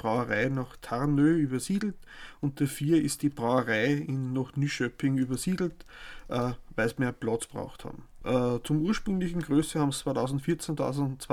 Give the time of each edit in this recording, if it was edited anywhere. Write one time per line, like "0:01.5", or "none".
0:08.2